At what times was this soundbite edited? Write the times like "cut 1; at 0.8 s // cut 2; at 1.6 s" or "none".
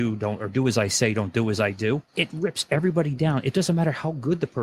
cut 1; at 2.1 s